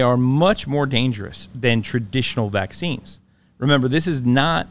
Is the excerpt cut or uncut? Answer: uncut